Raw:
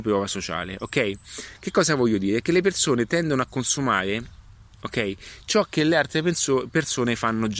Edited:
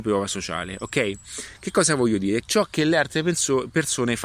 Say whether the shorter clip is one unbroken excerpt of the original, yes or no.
no